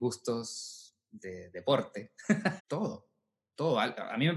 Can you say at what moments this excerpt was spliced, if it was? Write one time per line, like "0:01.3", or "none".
0:02.6